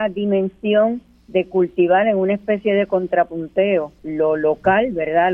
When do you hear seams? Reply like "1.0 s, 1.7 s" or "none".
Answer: 4.0 s